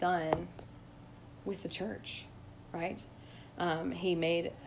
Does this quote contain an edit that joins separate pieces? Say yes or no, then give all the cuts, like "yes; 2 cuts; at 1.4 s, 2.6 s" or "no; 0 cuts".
no; 0 cuts